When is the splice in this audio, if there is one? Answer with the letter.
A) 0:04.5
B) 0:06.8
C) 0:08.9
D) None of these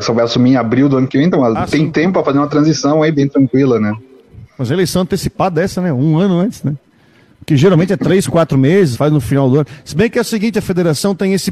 C